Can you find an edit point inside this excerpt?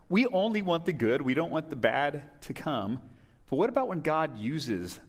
no; 0 cuts

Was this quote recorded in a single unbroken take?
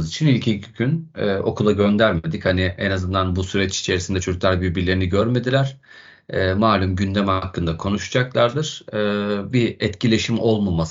yes; 0 cuts

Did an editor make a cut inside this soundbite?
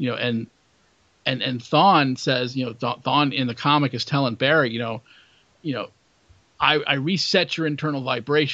no; 0 cuts

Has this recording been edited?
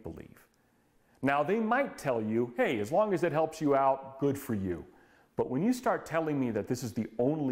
no; 0 cuts

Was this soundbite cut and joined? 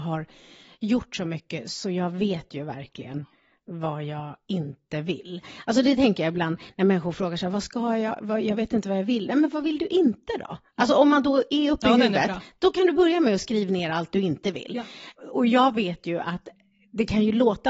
no; 0 cuts

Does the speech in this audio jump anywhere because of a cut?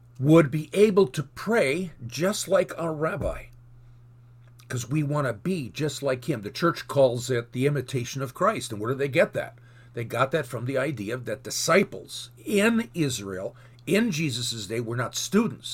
no; 0 cuts

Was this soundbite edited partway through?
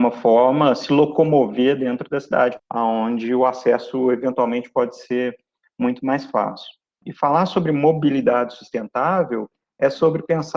yes; 2 cuts; at 2.6 s, 7.0 s

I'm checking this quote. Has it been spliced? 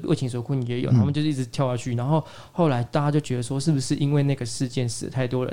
no; 0 cuts

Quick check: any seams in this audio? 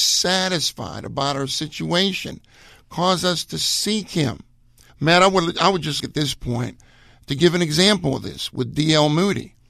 yes; 2 cuts; at 4.9 s, 6.0 s

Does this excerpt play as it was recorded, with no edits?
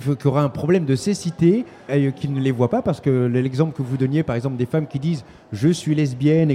no; 1 cut; at 1.9 s

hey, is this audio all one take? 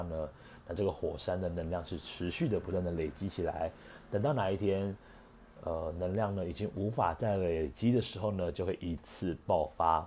yes; 0 cuts

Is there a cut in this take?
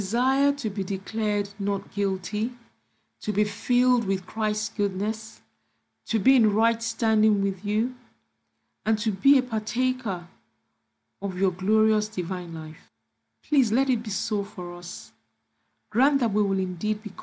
no; 0 cuts

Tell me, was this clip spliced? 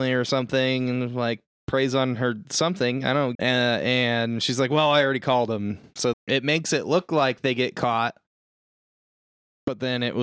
yes; 2 cuts; at 3.3 s, 6.1 s

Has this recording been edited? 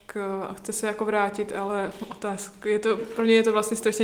yes; 1 cut; at 3.0 s

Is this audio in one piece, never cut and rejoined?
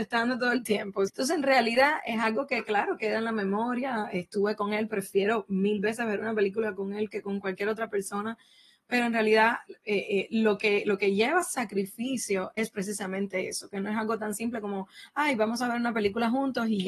no; 1 cut; at 1.1 s

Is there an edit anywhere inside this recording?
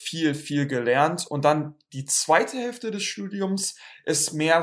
no; 0 cuts

